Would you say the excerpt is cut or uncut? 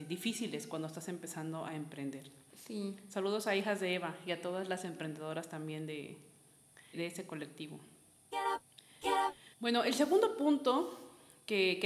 cut